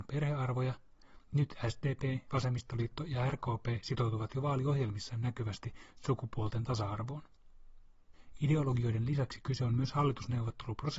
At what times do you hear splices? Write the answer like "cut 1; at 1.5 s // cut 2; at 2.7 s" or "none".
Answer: cut 1; at 2.3 s

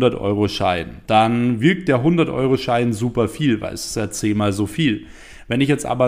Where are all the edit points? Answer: cut 1; at 1.0 s

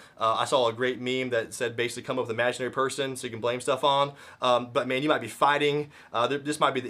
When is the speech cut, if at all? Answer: none

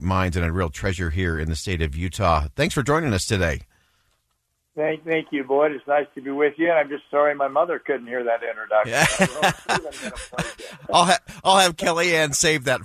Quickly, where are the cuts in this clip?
none

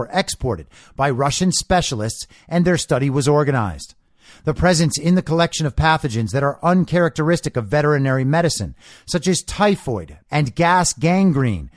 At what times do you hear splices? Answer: cut 1; at 10.3 s

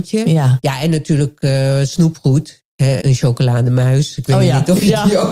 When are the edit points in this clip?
cut 1; at 3.0 s

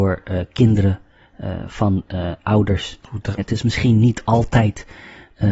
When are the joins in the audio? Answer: cut 1; at 3.4 s

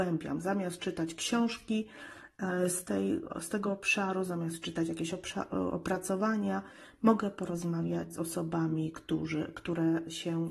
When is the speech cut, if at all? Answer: none

